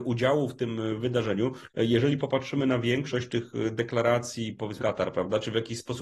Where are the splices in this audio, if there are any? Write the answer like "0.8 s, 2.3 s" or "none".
1.7 s, 4.8 s